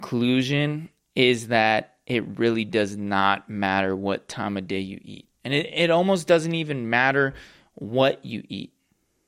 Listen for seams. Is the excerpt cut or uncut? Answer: uncut